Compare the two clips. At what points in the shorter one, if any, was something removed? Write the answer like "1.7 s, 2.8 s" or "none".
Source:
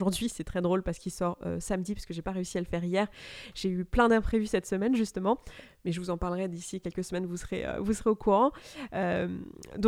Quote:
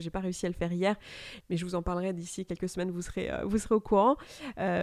1.4 s